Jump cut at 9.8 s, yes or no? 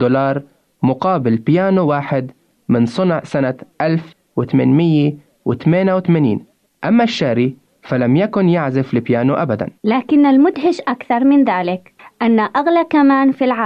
yes